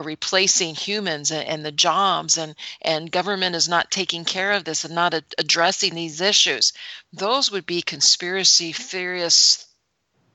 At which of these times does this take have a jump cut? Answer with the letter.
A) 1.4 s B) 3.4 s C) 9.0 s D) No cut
D